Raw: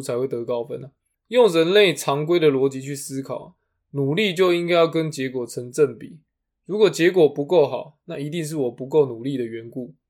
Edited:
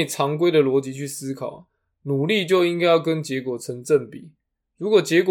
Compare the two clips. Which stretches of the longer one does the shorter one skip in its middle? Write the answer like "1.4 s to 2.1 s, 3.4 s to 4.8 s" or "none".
none